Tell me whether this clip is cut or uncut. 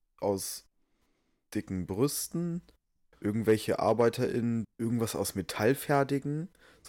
cut